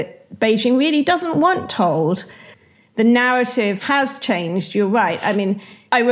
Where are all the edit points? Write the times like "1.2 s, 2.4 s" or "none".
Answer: none